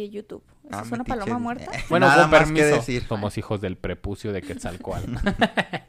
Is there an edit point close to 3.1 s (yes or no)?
yes